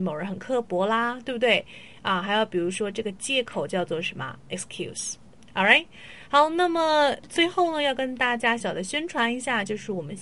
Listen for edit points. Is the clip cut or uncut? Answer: cut